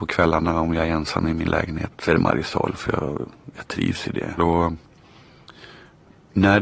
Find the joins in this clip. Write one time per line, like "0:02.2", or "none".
0:01.9
0:04.4